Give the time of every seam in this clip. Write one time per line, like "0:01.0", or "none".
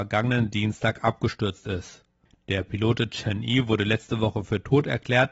0:02.4

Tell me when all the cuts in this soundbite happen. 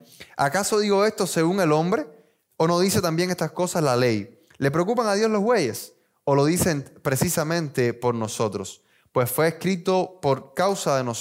0:04.5

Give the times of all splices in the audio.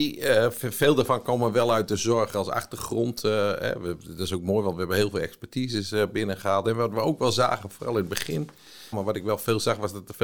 0:08.9

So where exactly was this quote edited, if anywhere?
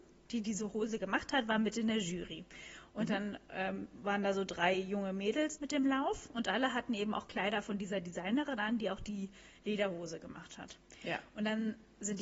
0:05.6

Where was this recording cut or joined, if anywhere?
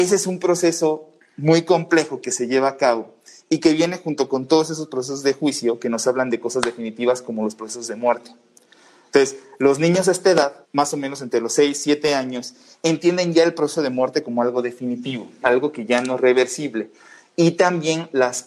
0:10.6
0:15.4

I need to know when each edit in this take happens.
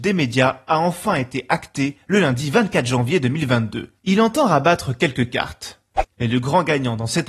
0:06.1

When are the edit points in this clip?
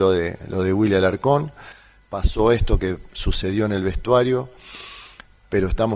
none

